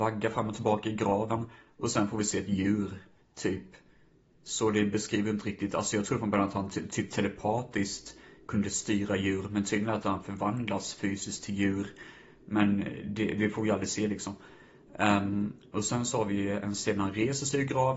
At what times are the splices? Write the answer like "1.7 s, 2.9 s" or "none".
none